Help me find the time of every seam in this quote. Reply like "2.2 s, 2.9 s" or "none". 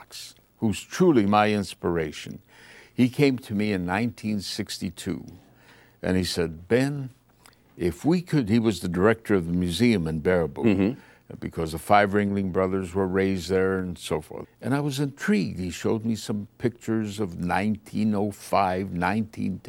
14.4 s